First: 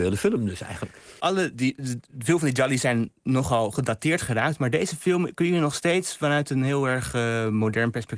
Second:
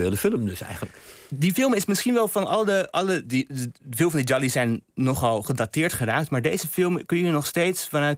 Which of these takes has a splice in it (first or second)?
first